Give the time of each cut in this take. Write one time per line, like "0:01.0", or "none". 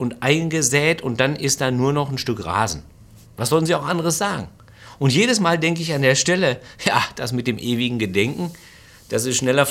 0:03.2